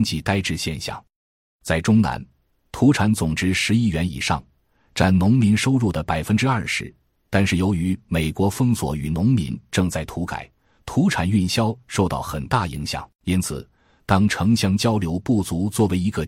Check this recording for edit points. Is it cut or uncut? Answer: cut